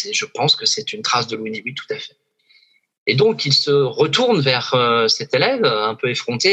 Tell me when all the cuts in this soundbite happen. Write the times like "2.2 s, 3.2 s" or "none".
none